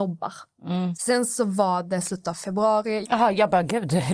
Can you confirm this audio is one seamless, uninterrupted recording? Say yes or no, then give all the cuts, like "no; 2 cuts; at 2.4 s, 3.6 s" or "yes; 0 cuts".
no; 2 cuts; at 0.9 s, 3.0 s